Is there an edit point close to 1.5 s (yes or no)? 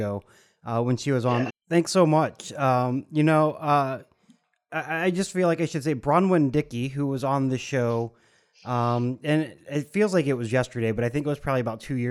yes